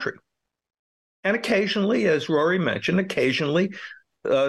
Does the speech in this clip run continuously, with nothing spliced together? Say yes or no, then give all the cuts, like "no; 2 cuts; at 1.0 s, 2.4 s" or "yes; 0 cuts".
yes; 0 cuts